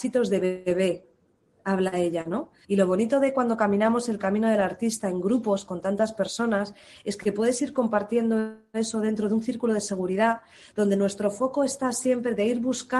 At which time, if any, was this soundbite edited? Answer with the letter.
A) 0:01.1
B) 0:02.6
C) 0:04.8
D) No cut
B